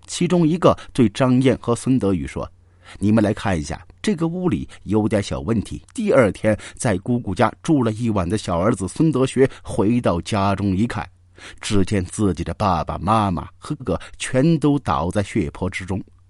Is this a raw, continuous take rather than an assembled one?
no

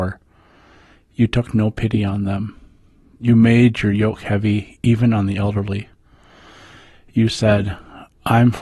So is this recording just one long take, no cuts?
yes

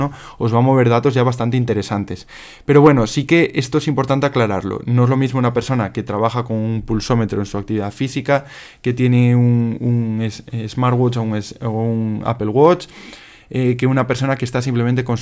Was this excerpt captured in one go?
yes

